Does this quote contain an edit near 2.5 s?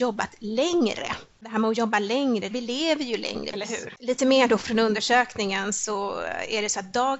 yes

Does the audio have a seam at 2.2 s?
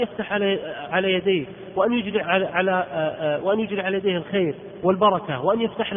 yes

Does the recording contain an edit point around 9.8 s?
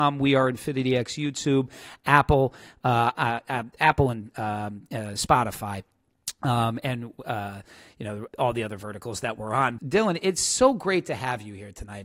yes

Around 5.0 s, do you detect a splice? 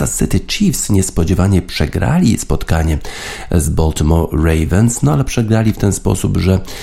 no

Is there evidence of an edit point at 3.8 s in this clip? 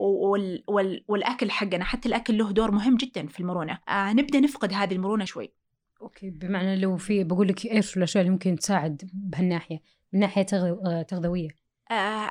yes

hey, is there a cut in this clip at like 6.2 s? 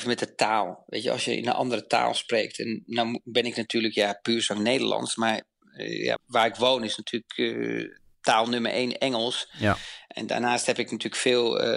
yes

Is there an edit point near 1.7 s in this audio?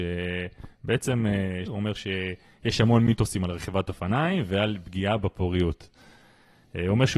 yes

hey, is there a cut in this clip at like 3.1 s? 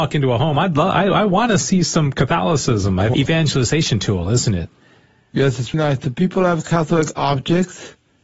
yes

